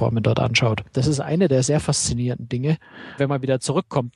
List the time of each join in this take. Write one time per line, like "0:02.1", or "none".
0:00.9
0:03.2